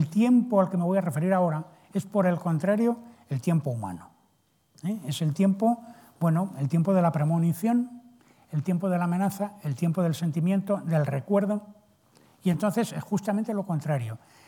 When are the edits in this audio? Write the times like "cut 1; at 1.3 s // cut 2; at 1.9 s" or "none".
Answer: none